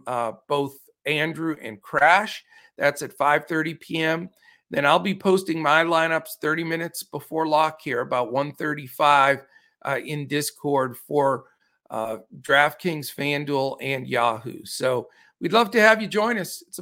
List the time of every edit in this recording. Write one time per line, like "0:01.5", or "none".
none